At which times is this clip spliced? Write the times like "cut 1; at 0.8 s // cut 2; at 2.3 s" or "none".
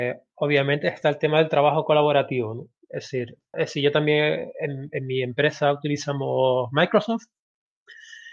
cut 1; at 3.5 s